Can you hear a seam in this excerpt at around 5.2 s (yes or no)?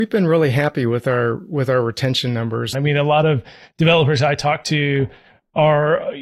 no